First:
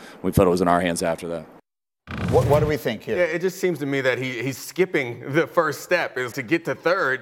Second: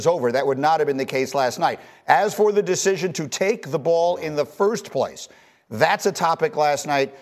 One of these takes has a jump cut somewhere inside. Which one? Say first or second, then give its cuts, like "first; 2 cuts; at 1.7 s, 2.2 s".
first; 1 cut; at 6.3 s